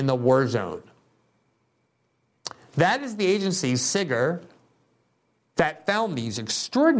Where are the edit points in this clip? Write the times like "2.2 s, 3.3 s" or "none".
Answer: none